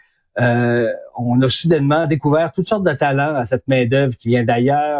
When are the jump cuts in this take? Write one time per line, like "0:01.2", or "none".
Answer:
none